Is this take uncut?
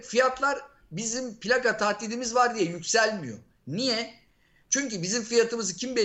yes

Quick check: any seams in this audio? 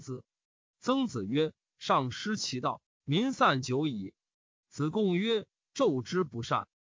yes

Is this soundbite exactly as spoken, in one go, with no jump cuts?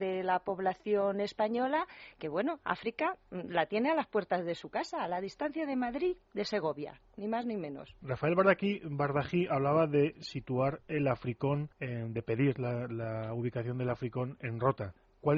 no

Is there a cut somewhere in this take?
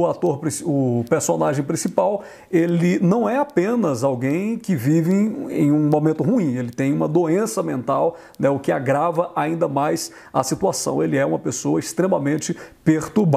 no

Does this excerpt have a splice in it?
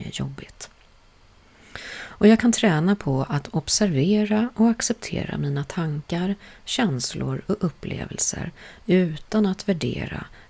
no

